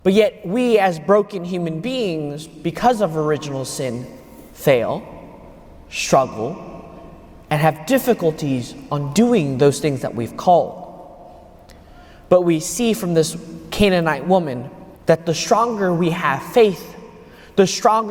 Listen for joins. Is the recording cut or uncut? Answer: cut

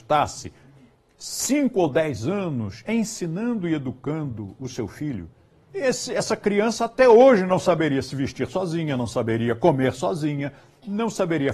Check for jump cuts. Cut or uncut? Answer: cut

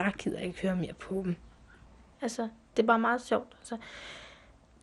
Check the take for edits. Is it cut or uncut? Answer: cut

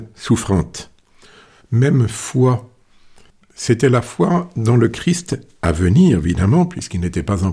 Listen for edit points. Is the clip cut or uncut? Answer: cut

